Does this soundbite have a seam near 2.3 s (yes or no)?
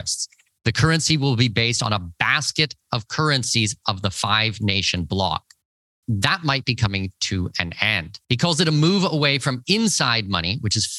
no